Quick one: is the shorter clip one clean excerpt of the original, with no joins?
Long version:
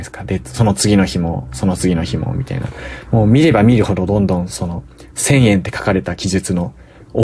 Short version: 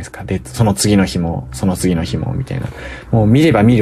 yes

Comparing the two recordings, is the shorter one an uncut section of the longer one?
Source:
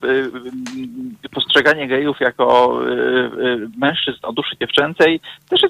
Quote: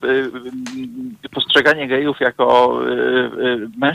yes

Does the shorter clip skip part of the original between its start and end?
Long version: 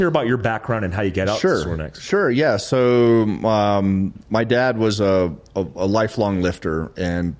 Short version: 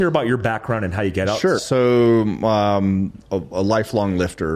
yes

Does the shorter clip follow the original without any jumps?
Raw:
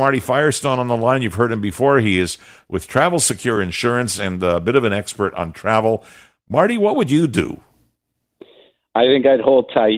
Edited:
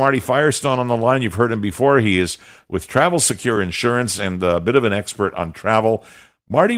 yes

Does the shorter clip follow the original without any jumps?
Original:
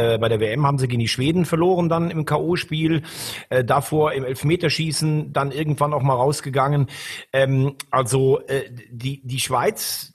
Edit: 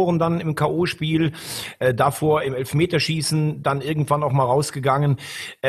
yes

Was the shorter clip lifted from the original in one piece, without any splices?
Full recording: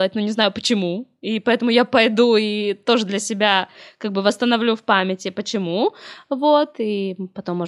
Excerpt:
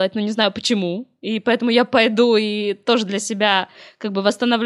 yes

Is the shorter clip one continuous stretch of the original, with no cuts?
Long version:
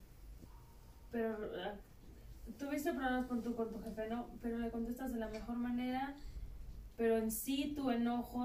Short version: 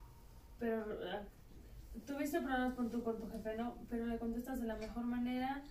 yes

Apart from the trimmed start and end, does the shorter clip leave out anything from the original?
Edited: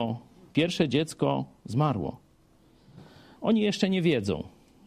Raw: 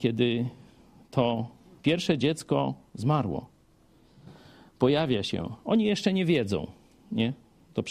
yes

